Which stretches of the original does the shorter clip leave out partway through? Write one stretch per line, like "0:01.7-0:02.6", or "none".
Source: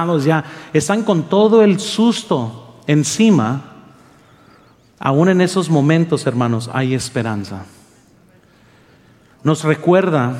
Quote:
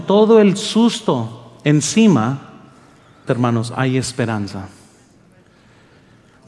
0:04.5-0:06.2

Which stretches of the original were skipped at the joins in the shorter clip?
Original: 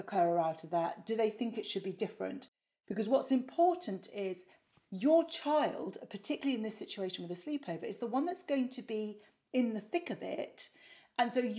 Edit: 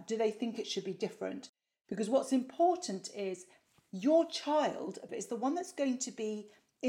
0:06.1-0:07.8

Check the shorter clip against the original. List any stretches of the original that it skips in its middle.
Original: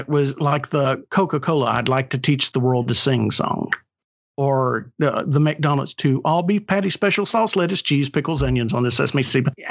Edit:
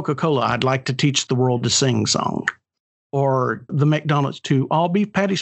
0:04.9-0:05.2

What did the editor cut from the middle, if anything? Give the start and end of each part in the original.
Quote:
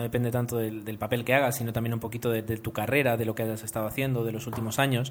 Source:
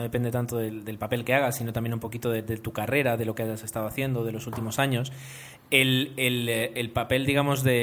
none

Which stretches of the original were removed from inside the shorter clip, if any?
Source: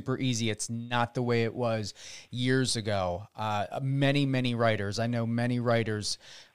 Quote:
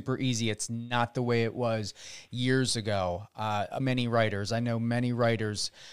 0:03.8-0:04.3

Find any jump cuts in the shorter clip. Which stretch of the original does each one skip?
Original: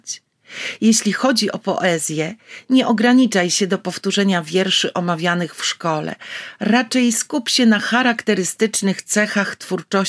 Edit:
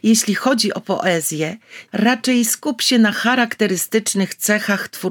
0:02.7-0:06.6

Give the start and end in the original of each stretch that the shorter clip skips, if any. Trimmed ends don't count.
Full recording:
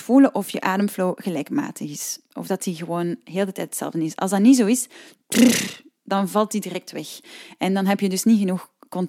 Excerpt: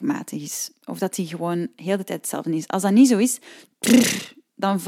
none

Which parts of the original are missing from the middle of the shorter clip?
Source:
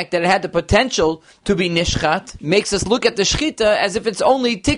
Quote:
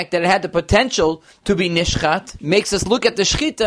none

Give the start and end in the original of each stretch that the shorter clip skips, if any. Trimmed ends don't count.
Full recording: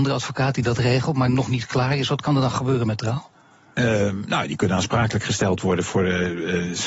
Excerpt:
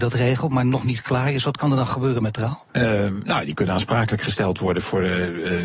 0:03.3-0:03.7

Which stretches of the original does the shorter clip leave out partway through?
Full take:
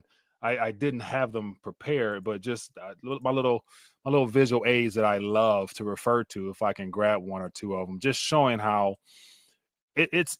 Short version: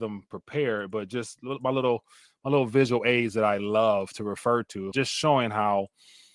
0:02.7-0:03.0
0:06.5-0:08.0

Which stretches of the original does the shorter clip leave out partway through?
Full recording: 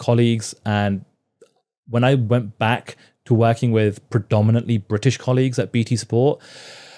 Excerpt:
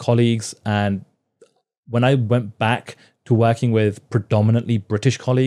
none

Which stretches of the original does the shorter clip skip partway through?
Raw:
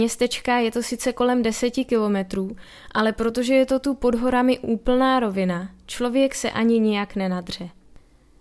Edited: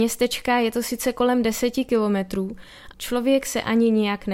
0:02.9-0:05.8

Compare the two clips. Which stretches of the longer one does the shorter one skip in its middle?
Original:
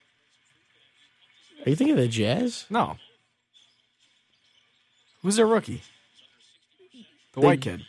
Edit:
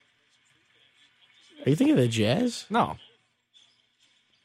none

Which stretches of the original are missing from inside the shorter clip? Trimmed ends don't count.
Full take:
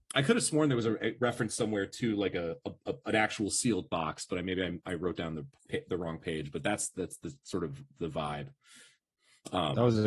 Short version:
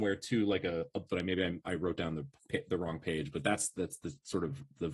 0:02.8-0:04.3

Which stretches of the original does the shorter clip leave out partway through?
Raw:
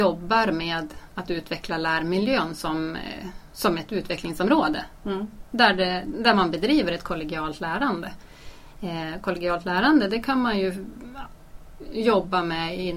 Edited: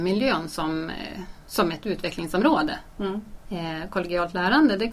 0:05.5-0:08.7

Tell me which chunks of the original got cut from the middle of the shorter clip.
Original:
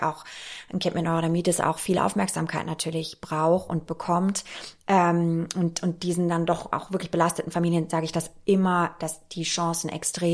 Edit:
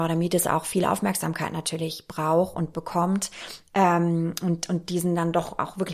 none

